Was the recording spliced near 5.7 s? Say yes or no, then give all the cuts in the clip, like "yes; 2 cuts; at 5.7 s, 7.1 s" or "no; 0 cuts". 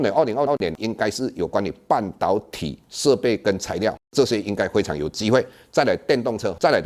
no; 1 cut; at 4.0 s